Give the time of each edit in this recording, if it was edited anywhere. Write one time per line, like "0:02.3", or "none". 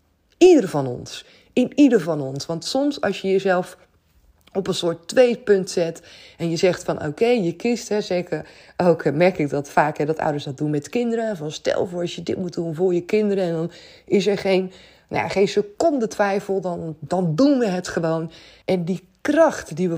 0:18.6